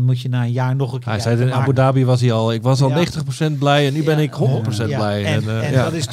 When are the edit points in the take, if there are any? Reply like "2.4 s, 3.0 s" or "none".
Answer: none